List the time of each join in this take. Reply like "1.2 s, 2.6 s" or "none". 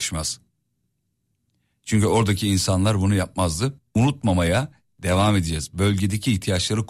3.8 s